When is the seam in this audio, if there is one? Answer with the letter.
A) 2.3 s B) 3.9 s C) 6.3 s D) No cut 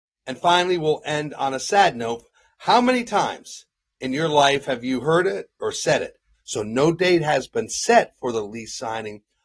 C